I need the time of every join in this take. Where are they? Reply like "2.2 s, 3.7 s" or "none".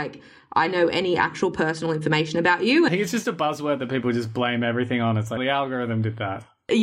2.9 s, 5.4 s